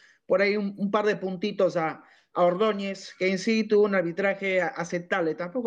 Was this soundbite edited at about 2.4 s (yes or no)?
no